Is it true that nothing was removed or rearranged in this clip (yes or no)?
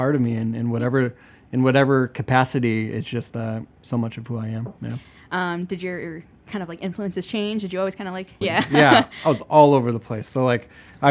no